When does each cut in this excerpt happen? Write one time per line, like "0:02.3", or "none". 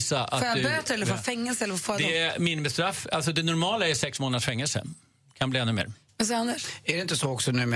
0:06.1